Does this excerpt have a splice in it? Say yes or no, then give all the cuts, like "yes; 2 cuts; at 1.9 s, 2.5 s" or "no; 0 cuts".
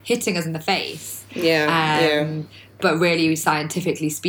no; 0 cuts